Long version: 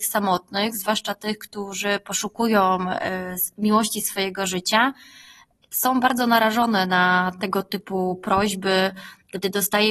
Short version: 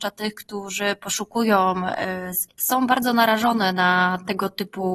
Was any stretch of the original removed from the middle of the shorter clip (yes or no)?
yes